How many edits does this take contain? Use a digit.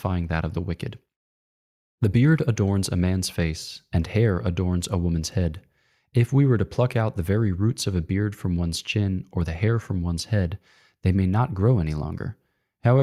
0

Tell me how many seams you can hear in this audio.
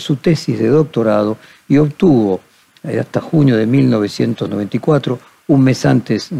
0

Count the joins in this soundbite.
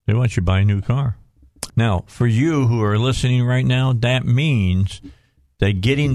1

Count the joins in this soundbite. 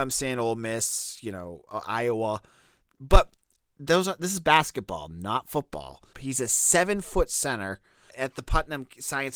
2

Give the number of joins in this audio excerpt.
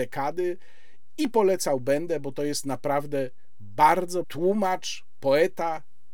1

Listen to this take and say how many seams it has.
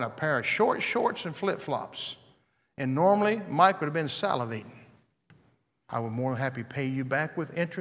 1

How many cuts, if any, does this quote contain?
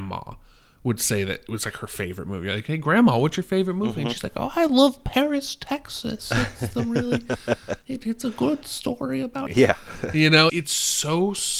2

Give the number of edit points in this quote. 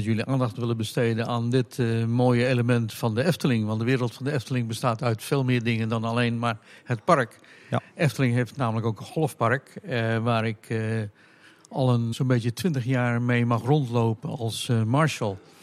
1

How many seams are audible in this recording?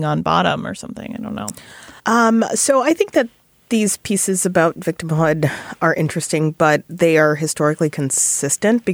1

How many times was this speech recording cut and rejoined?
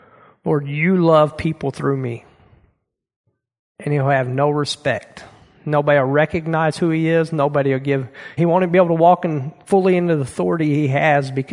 2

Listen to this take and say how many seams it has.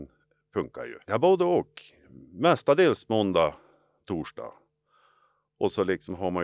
1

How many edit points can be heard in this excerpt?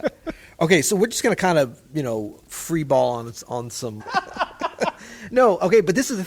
1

